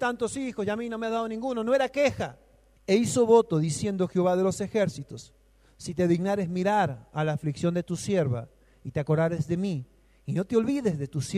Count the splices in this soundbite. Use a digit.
1